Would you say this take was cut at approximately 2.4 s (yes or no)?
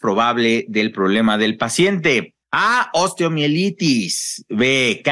yes